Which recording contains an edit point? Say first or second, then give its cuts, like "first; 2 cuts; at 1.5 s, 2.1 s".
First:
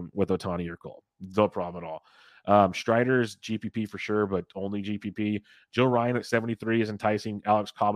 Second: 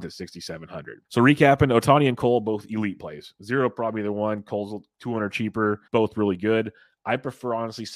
second; 2 cuts; at 1.0 s, 5.9 s